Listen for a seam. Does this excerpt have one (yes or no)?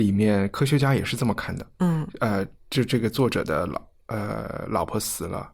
no